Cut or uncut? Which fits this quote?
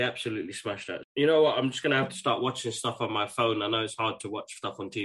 cut